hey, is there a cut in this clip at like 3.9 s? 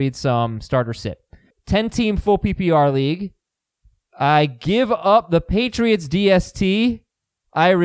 no; 1 cut; at 1.5 s

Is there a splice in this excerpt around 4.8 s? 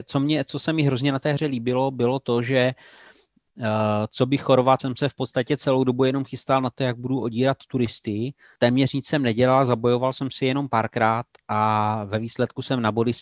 no; 0 cuts

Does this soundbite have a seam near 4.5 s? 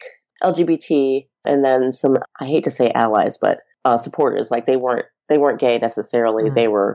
no; 0 cuts

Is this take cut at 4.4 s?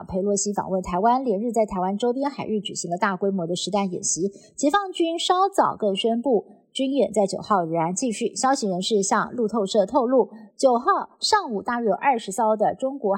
no; 0 cuts

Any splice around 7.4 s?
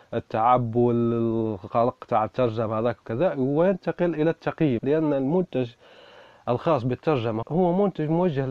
yes; 2 cuts; at 4.8 s, 7.4 s

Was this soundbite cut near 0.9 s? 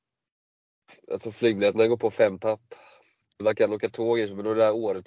no; 1 cut; at 3.2 s

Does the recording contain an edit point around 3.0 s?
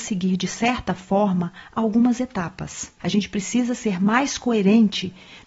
yes; 1 cut; at 3.0 s

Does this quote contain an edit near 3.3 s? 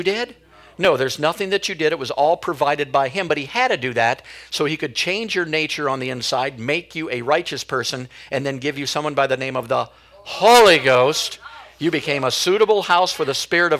no; 0 cuts

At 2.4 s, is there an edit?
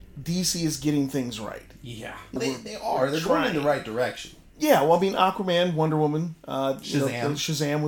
yes; 1 cut; at 2.4 s

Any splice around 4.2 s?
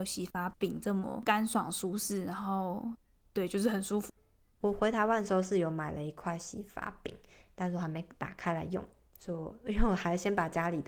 yes; 1 cut; at 4.2 s

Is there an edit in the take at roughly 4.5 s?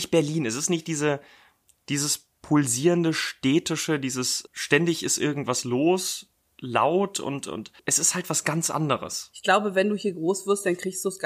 yes; 2 cuts; at 4.5 s, 7.8 s

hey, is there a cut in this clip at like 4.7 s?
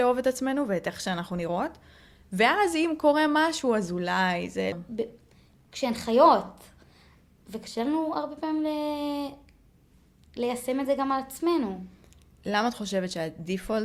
yes; 1 cut; at 4.7 s

